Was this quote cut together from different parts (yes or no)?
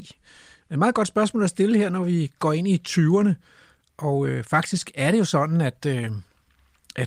no